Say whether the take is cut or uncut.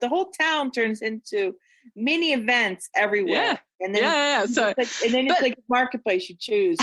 uncut